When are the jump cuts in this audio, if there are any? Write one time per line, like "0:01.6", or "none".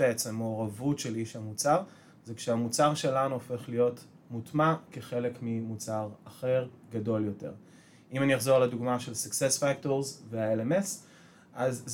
none